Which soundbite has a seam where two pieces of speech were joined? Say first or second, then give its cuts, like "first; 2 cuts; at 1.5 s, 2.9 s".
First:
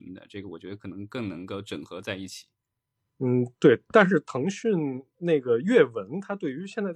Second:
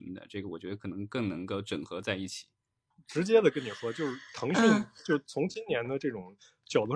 second; 1 cut; at 2.9 s